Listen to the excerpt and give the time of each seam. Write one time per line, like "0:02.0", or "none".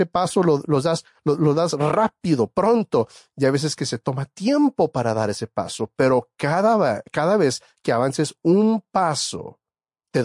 none